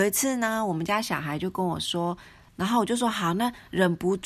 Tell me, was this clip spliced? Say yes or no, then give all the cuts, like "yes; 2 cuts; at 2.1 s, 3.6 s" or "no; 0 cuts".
yes; 1 cut; at 2.5 s